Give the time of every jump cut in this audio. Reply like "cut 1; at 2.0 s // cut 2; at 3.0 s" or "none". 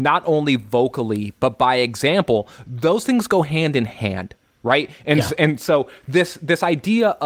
none